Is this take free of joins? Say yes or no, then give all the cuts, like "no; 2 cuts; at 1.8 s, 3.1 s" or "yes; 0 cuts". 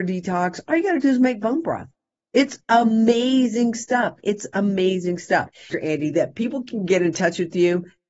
no; 1 cut; at 5.7 s